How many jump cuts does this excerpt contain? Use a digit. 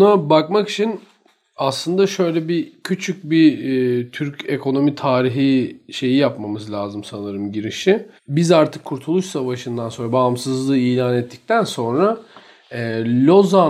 1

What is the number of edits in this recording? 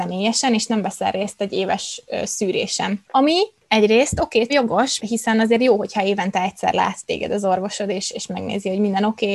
2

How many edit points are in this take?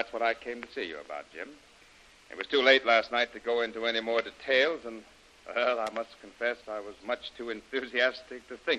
1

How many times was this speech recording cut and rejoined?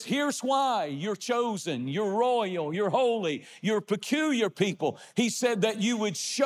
0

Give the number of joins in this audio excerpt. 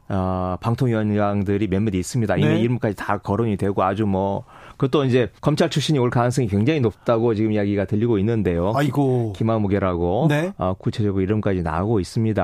1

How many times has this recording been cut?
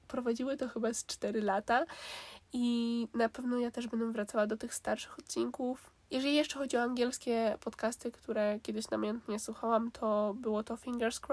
1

